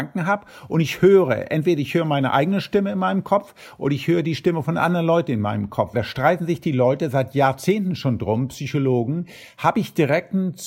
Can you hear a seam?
yes; 1 cut; at 5.9 s

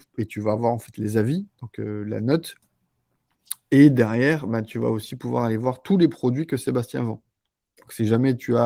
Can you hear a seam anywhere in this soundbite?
no; 0 cuts

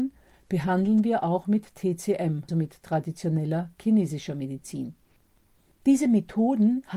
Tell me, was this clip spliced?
yes; 1 cut; at 2.5 s

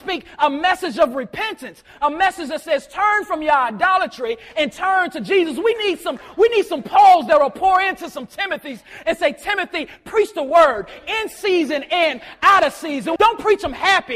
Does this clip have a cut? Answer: yes; 1 cut; at 13.2 s

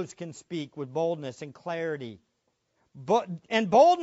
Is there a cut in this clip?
yes; 1 cut; at 2.7 s

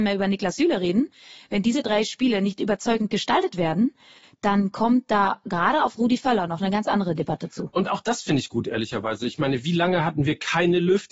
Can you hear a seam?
no; 0 cuts

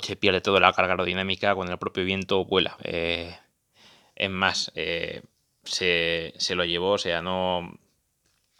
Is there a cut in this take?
yes; 1 cut; at 2.8 s

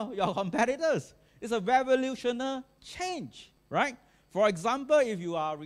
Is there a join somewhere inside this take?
no; 0 cuts

